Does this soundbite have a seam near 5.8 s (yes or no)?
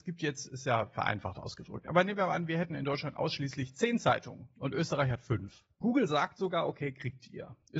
yes